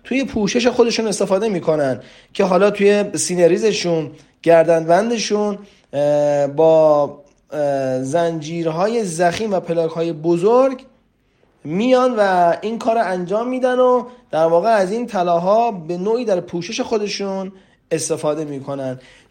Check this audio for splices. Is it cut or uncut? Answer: uncut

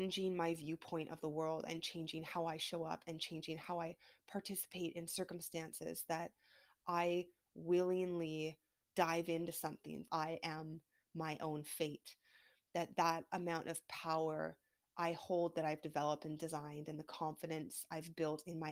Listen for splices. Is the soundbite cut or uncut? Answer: cut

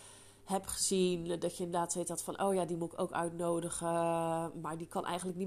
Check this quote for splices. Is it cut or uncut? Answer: uncut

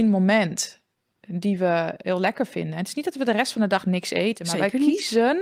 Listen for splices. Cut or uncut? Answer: uncut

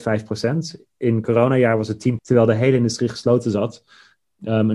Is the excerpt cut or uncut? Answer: cut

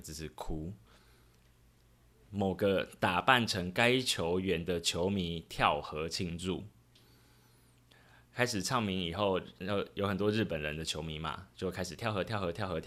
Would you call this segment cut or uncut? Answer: cut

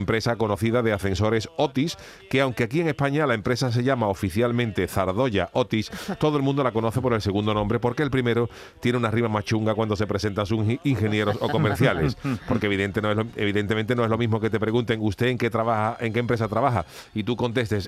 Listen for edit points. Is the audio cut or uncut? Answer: uncut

